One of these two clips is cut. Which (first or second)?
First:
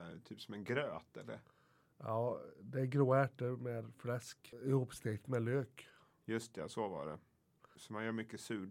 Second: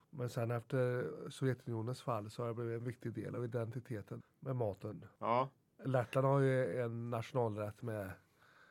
second